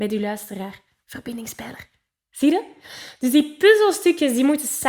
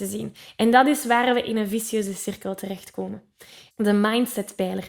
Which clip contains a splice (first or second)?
second